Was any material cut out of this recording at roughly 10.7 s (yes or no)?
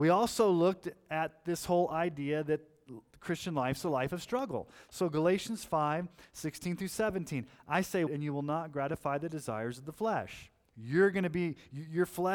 yes